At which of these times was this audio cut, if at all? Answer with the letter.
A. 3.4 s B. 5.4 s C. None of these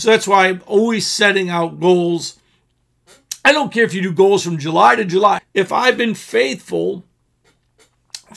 B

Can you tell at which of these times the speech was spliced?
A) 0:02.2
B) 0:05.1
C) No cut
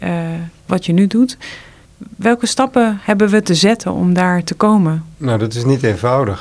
B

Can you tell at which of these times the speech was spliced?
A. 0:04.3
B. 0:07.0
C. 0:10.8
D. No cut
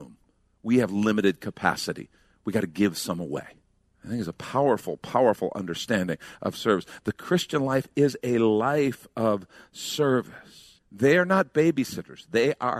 C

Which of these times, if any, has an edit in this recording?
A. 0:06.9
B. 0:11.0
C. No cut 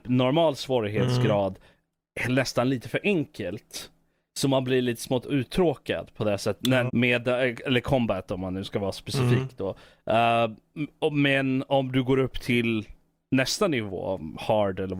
A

